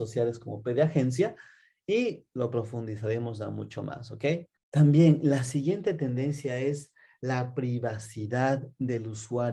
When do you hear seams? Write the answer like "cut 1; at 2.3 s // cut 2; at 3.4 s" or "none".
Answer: cut 1; at 4.6 s

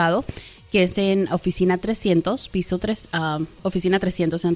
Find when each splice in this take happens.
cut 1; at 3.6 s

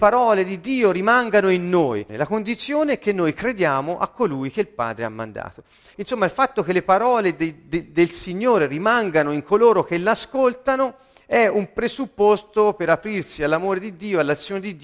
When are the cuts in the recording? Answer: cut 1; at 2.1 s // cut 2; at 5.9 s

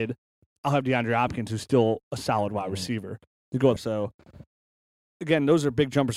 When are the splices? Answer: cut 1; at 3.8 s

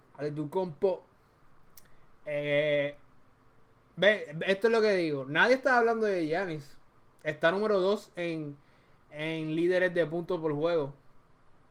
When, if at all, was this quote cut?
none

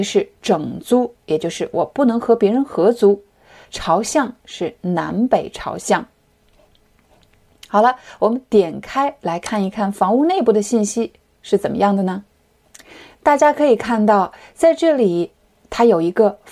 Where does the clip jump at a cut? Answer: none

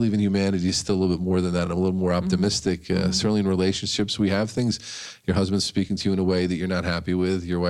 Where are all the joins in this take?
none

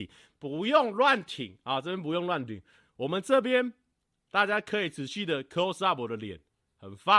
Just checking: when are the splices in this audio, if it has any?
none

